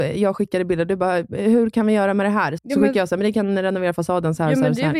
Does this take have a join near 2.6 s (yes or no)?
yes